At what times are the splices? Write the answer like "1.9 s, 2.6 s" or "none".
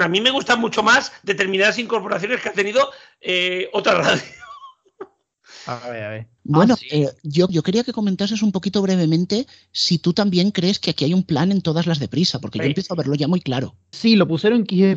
6.4 s, 7.5 s, 13.9 s